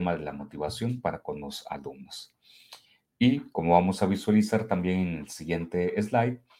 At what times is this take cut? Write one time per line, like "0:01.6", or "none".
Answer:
none